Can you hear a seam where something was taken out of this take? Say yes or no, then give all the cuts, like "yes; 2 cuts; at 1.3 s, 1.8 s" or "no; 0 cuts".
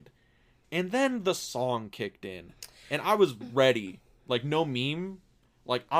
no; 0 cuts